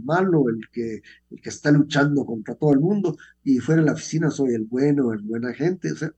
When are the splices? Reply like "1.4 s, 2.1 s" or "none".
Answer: none